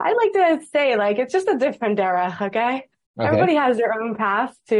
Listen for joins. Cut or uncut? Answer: uncut